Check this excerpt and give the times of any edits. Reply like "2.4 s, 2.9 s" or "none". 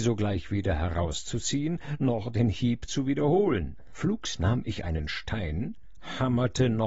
3.9 s